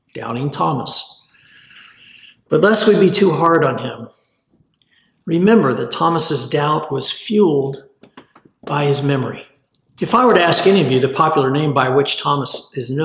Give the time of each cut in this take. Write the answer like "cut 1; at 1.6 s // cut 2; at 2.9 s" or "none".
cut 1; at 10.0 s